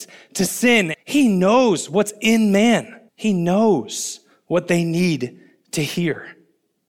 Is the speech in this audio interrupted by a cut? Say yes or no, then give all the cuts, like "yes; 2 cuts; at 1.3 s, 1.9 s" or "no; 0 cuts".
yes; 2 cuts; at 0.9 s, 3.1 s